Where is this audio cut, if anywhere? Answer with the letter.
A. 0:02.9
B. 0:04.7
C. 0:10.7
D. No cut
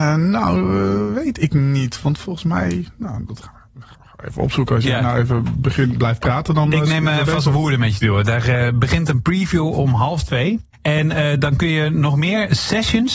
C